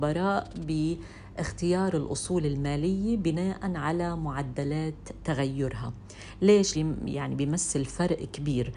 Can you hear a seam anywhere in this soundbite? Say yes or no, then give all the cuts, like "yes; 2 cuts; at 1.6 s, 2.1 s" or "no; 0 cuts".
yes; 1 cut; at 6.7 s